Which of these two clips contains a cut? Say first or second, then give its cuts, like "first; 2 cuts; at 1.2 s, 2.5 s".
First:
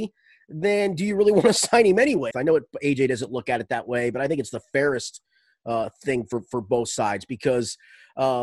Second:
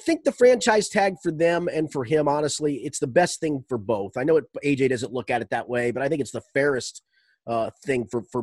first; 1 cut; at 2.3 s